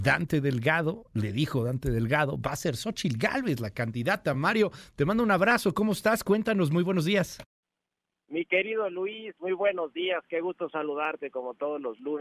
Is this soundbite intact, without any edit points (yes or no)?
yes